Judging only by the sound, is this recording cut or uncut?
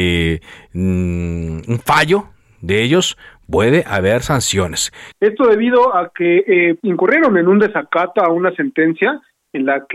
cut